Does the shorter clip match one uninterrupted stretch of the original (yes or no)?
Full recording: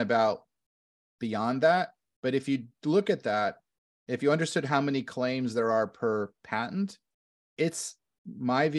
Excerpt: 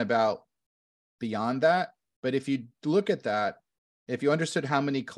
yes